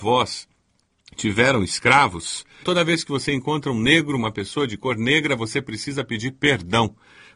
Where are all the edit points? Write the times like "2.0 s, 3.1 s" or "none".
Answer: 2.6 s